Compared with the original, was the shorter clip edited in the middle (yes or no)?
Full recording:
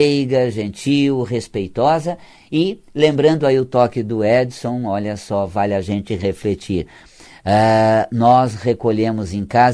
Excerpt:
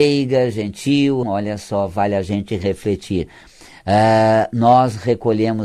yes